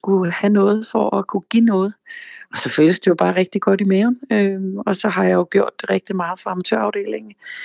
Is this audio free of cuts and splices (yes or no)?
yes